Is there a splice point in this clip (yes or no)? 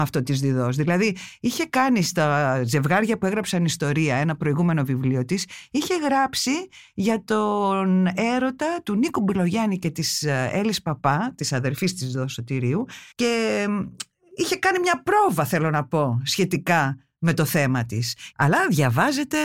yes